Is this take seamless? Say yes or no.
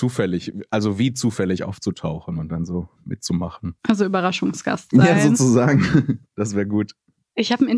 no